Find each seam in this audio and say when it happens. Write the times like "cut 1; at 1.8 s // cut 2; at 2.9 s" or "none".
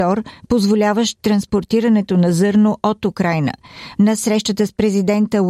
cut 1; at 4.0 s